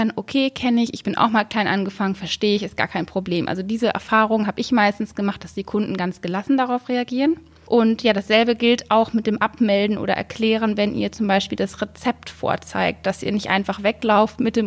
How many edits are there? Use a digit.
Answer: 0